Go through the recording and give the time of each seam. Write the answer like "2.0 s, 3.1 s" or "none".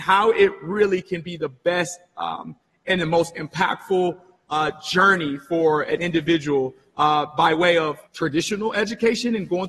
8.1 s